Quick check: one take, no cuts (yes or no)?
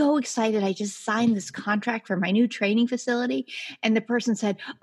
yes